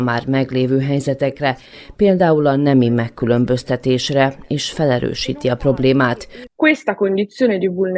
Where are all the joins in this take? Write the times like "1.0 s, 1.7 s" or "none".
6.5 s